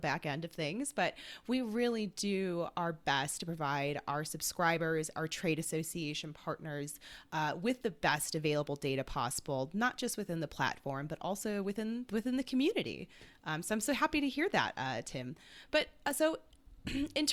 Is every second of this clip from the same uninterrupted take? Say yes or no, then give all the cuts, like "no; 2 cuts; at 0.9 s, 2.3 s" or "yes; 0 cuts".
yes; 0 cuts